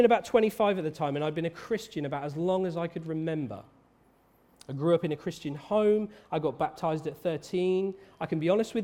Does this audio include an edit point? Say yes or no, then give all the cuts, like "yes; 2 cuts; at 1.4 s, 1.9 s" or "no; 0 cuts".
no; 0 cuts